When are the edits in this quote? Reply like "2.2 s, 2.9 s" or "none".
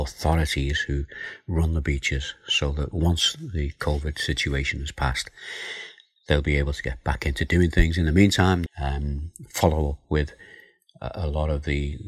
8.7 s